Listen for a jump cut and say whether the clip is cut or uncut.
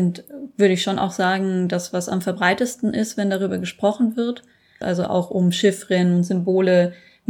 cut